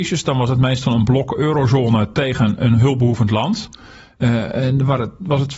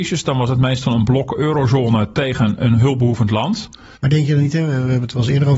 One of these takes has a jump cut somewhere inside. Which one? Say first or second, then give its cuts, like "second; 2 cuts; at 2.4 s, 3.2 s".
second; 1 cut; at 3.9 s